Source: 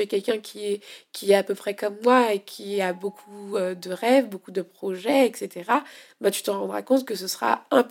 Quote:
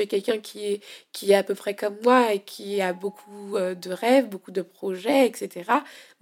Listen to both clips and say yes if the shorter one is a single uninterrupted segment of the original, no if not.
yes